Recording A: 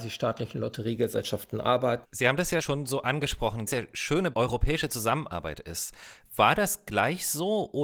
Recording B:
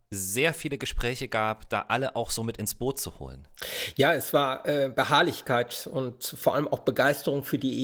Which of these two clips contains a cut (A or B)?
A